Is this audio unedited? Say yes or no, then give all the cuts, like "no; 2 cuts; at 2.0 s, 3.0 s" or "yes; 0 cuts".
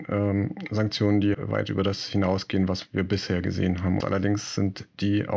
no; 2 cuts; at 1.3 s, 4.0 s